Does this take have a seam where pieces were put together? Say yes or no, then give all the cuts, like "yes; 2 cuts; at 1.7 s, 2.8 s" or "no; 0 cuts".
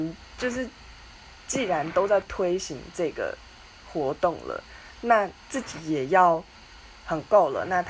yes; 1 cut; at 6.9 s